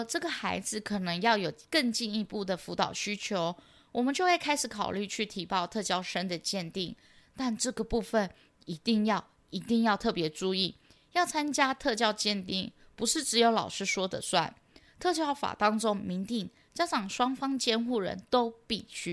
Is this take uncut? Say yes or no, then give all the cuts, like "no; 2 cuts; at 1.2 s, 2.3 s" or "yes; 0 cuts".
yes; 0 cuts